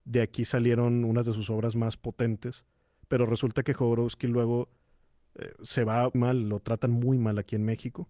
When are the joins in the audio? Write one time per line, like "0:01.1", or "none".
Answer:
0:06.1